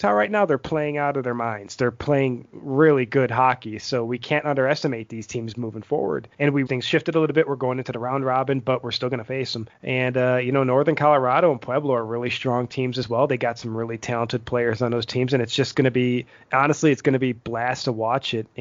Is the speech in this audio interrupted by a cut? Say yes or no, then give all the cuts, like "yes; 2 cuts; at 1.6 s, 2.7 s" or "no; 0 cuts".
yes; 1 cut; at 6.7 s